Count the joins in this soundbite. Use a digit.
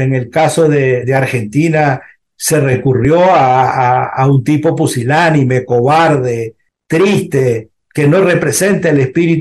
1